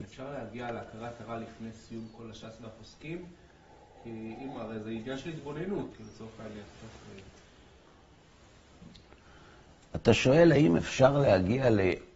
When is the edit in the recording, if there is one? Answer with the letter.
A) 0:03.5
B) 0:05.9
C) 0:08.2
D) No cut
B